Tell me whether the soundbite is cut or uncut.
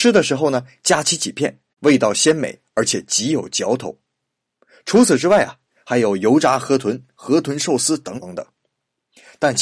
cut